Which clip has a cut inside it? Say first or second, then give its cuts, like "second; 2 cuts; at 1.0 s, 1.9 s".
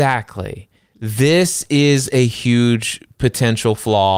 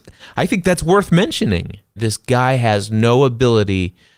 second; 1 cut; at 2.0 s